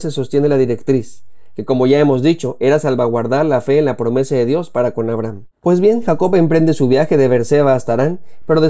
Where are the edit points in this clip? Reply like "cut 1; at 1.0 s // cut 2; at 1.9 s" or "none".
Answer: cut 1; at 5.5 s